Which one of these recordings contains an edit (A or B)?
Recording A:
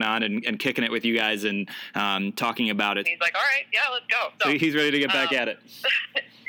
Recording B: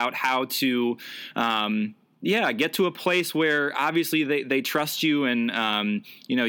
A